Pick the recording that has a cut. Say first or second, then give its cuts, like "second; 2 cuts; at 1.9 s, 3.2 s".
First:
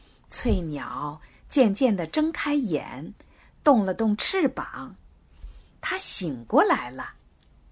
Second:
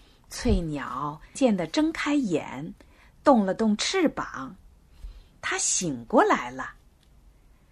second; 1 cut; at 1.4 s